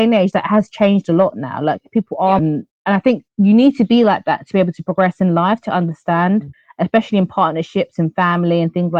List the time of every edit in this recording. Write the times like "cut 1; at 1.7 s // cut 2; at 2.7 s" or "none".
cut 1; at 2.4 s